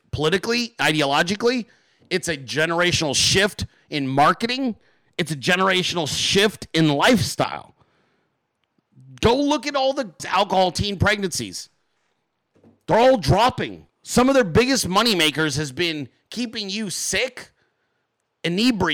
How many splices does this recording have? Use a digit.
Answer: 1